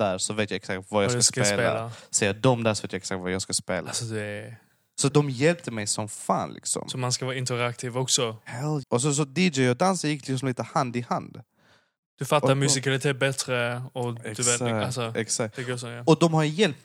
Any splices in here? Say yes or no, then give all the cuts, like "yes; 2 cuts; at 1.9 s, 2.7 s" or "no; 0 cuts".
yes; 2 cuts; at 5.1 s, 8.8 s